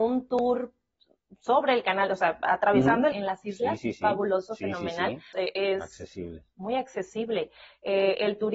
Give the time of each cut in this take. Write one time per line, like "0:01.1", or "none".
0:03.1
0:05.3